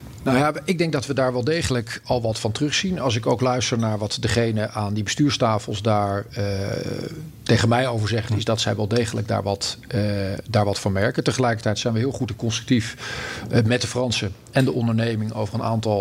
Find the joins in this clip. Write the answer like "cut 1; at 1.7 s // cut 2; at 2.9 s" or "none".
cut 1; at 8.3 s